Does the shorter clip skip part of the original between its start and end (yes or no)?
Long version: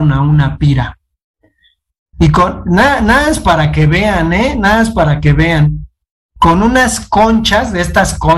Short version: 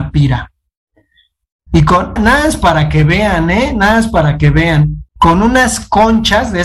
yes